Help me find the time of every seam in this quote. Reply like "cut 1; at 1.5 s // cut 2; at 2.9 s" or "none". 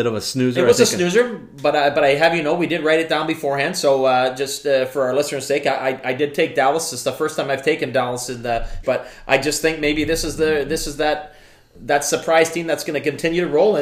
cut 1; at 8.8 s